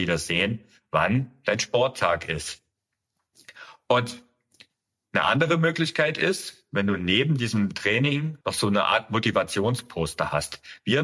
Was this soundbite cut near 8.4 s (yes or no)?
yes